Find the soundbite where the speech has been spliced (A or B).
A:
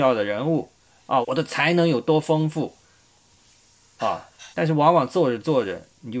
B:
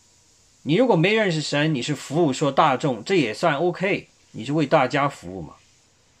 A